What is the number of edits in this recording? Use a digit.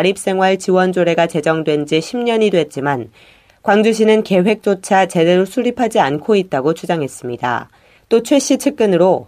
1